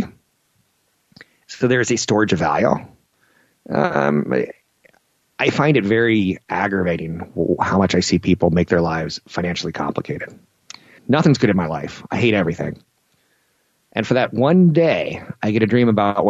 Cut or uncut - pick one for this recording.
cut